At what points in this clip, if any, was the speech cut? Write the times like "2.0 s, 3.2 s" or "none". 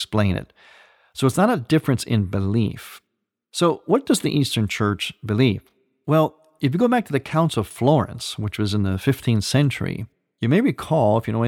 none